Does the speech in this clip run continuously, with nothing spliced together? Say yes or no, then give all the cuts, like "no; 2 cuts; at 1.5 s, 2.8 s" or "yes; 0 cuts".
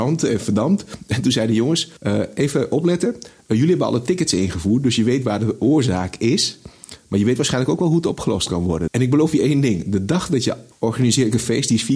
no; 3 cuts; at 2.0 s, 8.9 s, 10.7 s